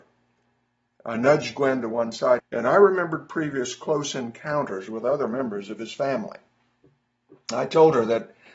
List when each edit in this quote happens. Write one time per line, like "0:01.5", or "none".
0:02.4